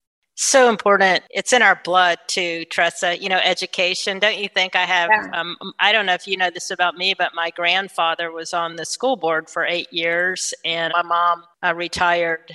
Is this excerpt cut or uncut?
cut